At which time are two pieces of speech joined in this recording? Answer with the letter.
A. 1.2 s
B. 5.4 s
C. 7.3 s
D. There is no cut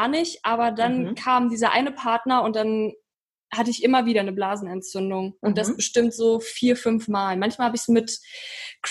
B